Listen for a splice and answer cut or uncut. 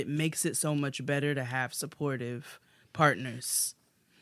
uncut